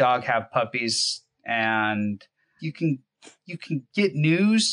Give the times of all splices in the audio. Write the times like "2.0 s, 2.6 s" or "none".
2.6 s